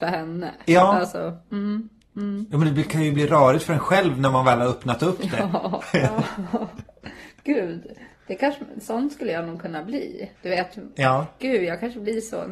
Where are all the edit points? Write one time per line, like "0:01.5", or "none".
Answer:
0:05.8
0:10.4